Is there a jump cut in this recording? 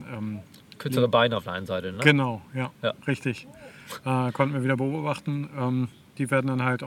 no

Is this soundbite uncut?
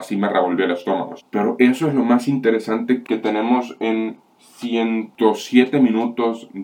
no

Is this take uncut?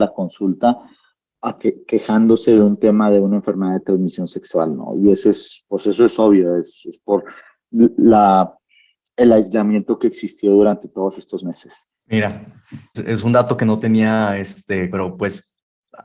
no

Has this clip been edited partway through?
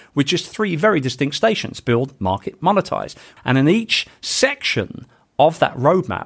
yes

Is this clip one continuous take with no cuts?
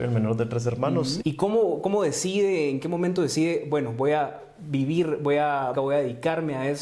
no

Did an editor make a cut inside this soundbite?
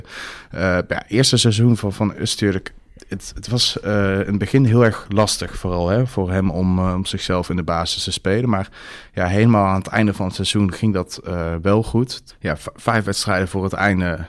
no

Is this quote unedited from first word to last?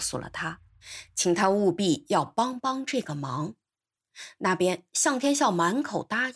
yes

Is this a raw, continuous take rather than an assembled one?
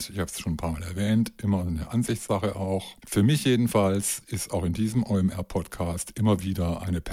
no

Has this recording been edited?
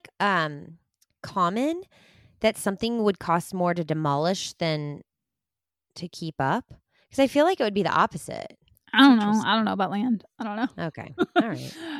no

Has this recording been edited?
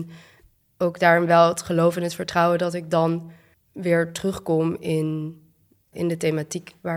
yes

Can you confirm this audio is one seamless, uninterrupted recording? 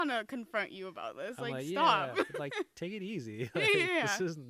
yes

